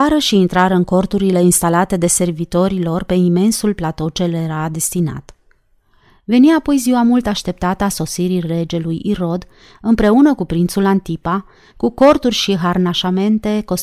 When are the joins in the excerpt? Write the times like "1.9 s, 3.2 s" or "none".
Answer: 11.7 s